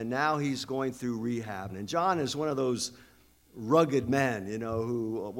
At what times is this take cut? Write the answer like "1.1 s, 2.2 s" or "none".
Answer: 1.7 s